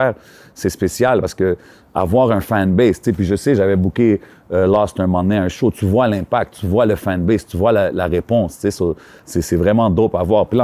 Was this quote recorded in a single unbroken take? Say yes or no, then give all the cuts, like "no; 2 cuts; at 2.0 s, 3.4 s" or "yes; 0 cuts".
yes; 0 cuts